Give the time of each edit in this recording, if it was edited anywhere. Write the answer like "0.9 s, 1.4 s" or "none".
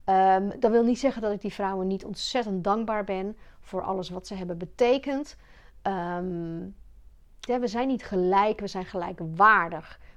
7.5 s